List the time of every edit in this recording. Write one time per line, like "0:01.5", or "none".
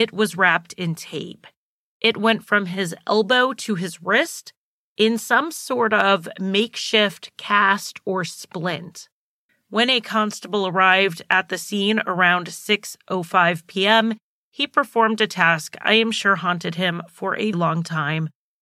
0:09.5
0:17.5